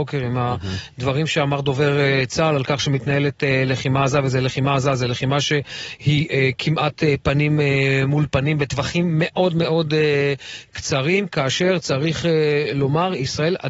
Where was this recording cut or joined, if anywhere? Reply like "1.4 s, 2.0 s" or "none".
none